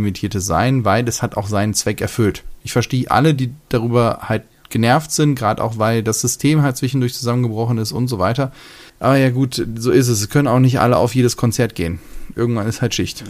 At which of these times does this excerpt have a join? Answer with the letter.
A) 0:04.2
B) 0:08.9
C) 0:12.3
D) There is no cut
B